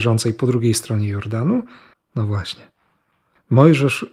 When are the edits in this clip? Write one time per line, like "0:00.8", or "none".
0:01.9